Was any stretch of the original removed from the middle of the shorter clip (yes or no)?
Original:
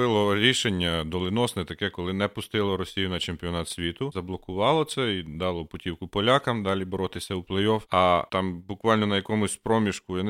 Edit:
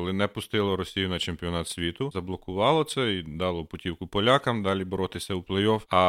no